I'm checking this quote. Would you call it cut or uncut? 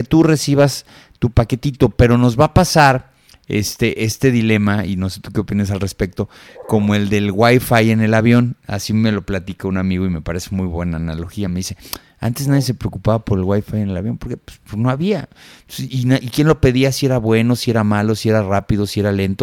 uncut